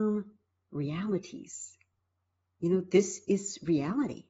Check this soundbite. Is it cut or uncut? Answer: uncut